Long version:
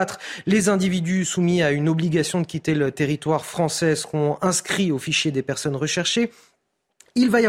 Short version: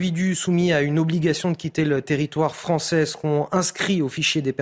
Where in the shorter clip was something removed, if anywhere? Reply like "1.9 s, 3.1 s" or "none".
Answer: none